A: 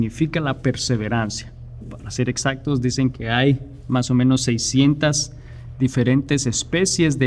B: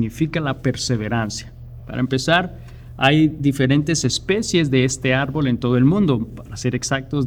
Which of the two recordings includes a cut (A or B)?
A